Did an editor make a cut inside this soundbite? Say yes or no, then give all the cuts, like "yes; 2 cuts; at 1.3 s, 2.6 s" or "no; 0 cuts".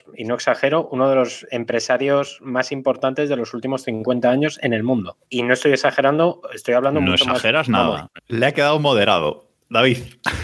yes; 2 cuts; at 5.2 s, 8.2 s